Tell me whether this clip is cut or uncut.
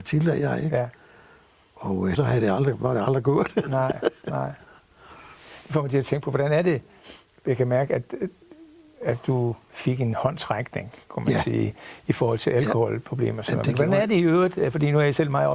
cut